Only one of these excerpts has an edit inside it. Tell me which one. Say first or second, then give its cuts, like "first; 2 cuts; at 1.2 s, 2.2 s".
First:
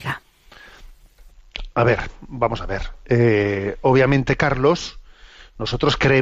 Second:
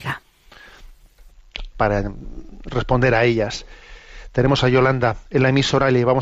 second; 1 cut; at 1.7 s